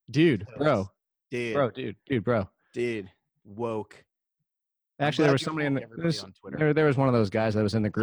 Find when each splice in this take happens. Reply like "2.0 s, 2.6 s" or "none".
none